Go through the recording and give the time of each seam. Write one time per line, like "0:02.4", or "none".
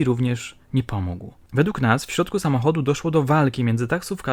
0:01.5

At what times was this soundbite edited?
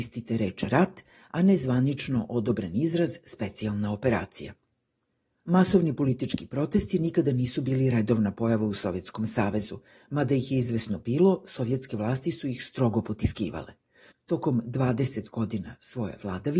none

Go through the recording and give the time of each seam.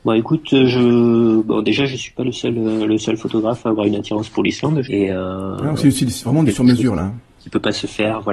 0:04.9

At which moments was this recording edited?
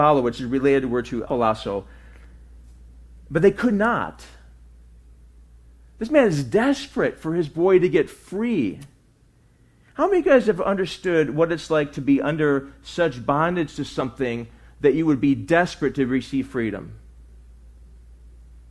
0:01.3

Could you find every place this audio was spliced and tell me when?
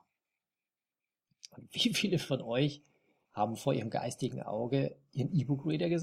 0:03.3

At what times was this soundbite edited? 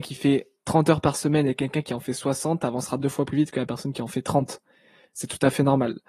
none

